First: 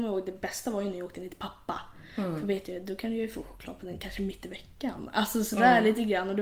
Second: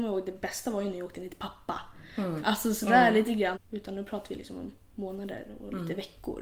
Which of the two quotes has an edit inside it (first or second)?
second